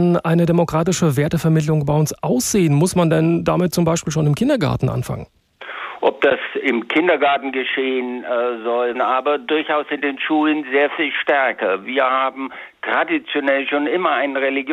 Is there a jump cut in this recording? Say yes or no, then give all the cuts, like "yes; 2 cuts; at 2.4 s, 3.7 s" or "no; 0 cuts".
yes; 1 cut; at 8.9 s